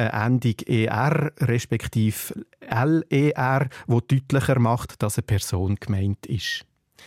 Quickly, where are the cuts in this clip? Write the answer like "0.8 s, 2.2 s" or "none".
none